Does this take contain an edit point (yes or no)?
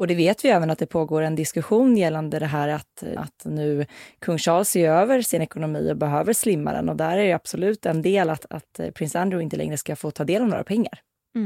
yes